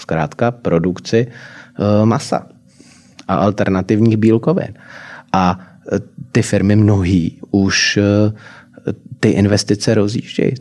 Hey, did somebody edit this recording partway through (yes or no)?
no